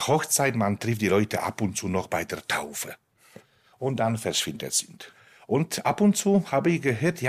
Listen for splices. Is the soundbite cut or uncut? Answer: uncut